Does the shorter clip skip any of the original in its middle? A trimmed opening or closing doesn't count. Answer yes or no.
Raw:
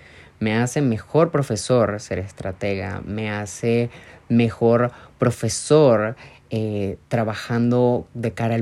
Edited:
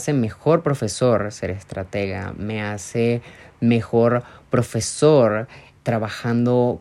yes